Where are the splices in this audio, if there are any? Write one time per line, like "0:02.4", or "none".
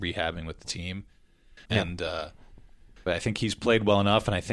0:01.6
0:03.1